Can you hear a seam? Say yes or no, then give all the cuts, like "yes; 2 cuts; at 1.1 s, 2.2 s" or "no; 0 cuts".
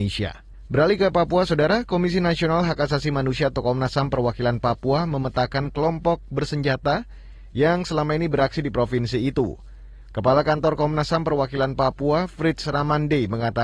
no; 0 cuts